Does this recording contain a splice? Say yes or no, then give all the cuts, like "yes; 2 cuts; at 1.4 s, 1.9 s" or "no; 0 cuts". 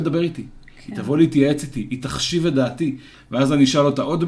yes; 1 cut; at 3.1 s